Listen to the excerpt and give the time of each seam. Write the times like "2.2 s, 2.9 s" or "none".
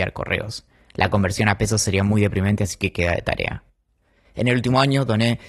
none